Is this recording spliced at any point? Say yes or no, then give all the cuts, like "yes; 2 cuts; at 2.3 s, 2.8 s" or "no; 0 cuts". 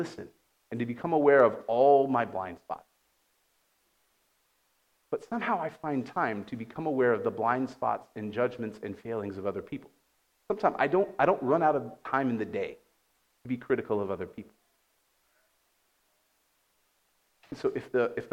no; 0 cuts